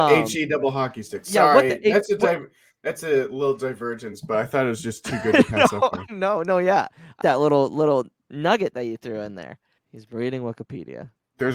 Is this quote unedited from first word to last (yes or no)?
no